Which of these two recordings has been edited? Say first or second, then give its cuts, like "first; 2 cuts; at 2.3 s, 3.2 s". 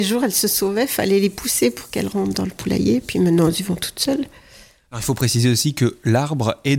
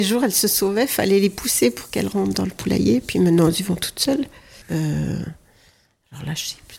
second; 1 cut; at 4.6 s